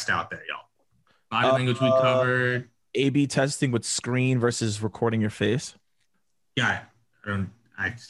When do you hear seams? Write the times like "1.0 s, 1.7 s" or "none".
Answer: none